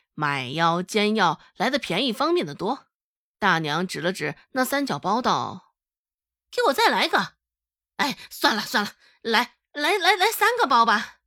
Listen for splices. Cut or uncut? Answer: cut